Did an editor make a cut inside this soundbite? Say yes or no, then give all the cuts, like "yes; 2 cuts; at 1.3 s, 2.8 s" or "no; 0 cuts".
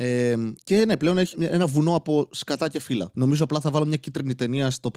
yes; 2 cuts; at 1.3 s, 3.1 s